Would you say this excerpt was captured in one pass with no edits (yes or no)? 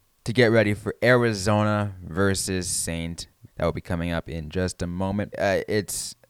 no